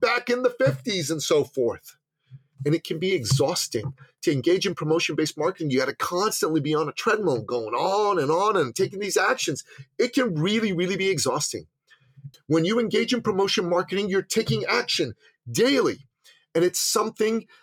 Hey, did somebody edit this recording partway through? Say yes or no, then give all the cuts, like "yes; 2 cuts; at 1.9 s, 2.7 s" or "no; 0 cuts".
yes; 1 cut; at 12.3 s